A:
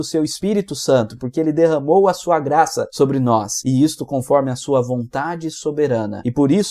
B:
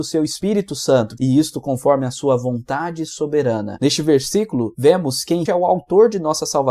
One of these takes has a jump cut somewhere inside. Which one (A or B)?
B